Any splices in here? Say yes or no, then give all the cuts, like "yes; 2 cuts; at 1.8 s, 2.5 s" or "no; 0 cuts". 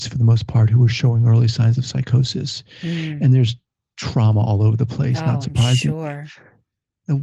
no; 0 cuts